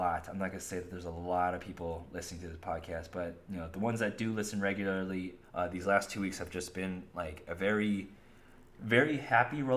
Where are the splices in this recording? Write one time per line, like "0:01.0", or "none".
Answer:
0:05.4

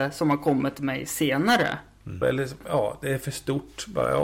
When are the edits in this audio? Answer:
0:02.2

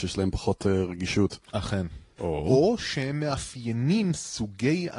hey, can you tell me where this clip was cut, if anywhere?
0:02.2

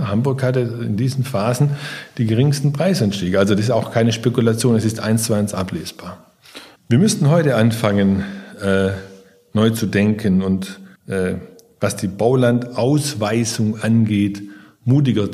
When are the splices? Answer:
0:06.8
0:11.0

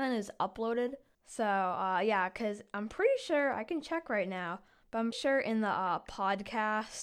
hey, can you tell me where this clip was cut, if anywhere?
0:01.1
0:05.1

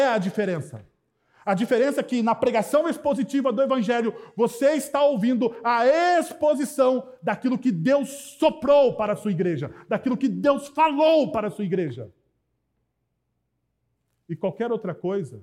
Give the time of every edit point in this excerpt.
none

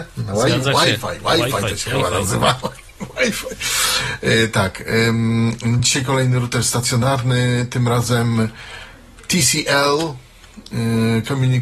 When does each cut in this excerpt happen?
none

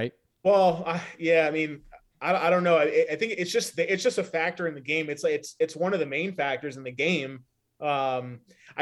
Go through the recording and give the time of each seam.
none

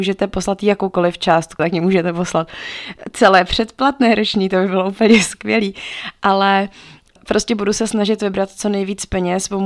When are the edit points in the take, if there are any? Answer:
0:01.6

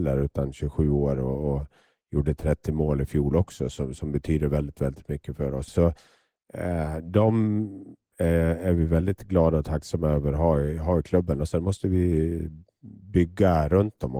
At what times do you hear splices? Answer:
0:05.7

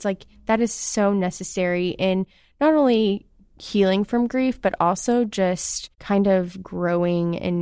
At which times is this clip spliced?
0:05.9

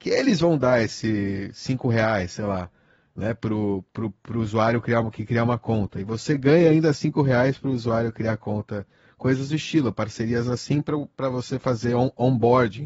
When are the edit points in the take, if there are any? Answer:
none

